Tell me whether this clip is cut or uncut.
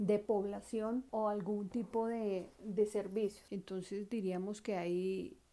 cut